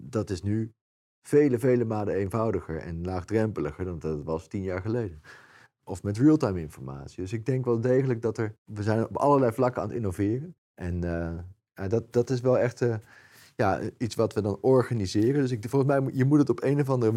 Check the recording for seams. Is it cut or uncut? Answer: cut